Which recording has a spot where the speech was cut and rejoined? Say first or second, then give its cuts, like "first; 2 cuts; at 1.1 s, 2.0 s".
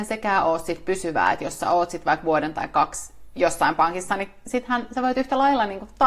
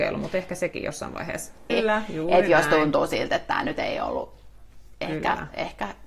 second; 1 cut; at 1.7 s